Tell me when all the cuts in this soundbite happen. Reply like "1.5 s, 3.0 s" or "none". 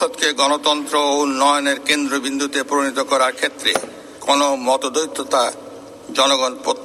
4.2 s